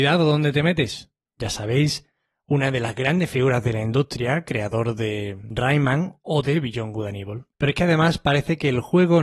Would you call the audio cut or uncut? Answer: cut